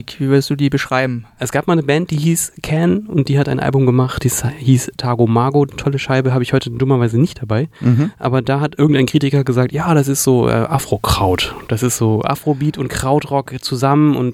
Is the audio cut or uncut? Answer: uncut